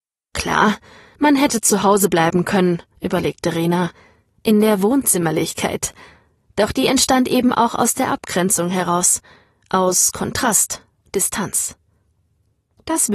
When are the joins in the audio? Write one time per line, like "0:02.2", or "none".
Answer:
none